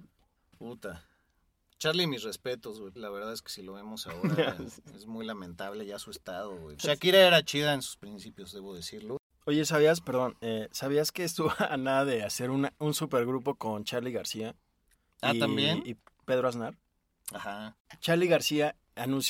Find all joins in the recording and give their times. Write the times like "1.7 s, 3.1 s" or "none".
3.0 s, 6.8 s